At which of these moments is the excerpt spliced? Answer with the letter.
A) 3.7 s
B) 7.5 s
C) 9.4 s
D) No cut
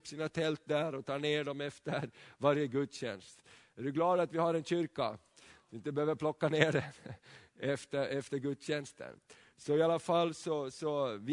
D